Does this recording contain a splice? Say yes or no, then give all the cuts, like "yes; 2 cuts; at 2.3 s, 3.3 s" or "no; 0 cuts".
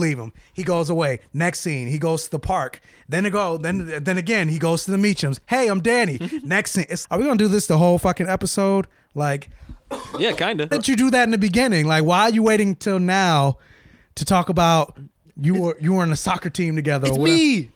yes; 2 cuts; at 7.0 s, 10.7 s